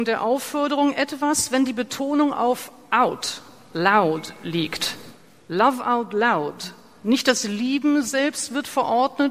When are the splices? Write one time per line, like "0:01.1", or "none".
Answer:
none